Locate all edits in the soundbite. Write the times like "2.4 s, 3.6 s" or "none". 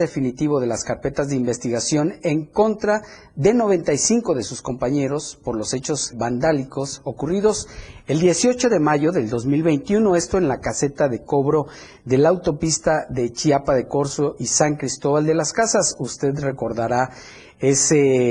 6.1 s